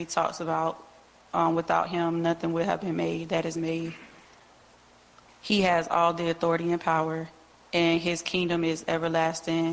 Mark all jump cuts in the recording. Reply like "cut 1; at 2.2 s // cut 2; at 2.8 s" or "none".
cut 1; at 5.3 s